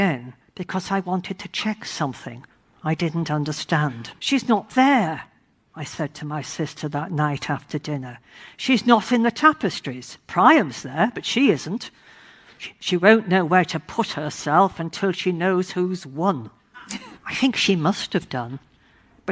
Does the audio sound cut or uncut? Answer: cut